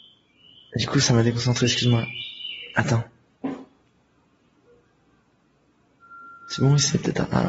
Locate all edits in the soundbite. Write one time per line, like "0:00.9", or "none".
none